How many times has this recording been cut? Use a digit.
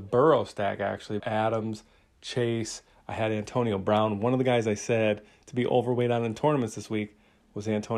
1